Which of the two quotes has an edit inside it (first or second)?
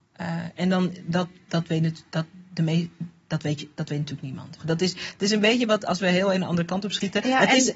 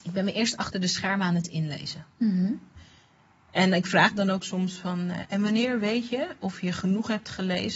first